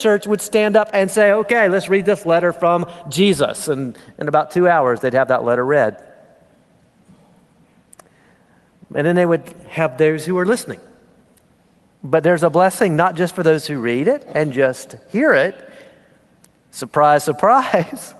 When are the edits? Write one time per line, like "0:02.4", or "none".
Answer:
none